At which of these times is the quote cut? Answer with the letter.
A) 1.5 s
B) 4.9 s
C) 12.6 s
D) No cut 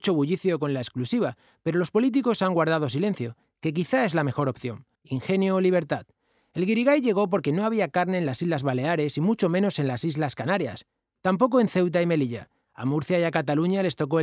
B